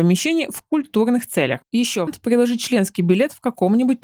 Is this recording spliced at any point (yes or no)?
yes